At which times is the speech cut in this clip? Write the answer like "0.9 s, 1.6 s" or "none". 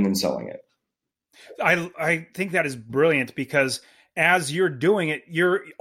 none